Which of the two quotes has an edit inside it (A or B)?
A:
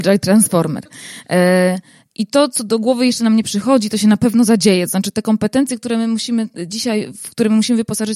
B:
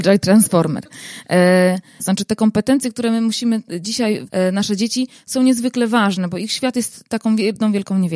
B